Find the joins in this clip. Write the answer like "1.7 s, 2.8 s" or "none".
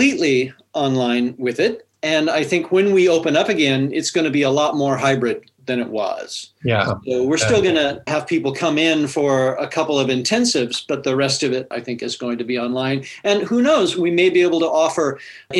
none